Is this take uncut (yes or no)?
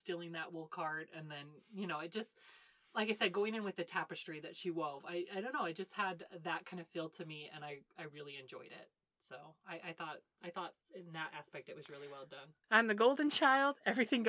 no